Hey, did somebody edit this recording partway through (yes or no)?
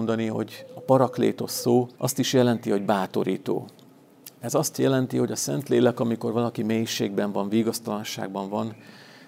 yes